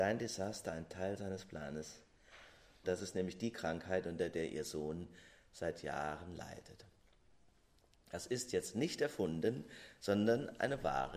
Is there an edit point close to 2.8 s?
yes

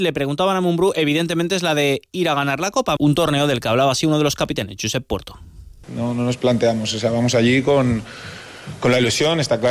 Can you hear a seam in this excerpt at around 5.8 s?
yes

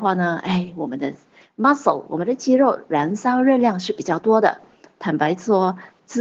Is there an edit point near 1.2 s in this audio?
no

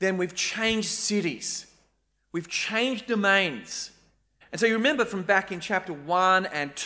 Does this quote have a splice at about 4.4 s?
yes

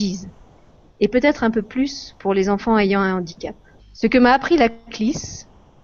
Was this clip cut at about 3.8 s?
yes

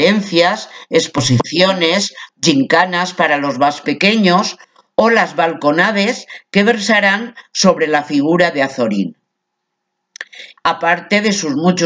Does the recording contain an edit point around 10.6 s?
yes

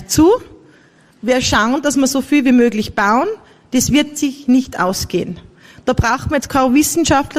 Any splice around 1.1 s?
no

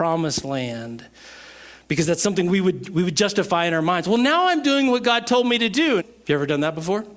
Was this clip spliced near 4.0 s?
no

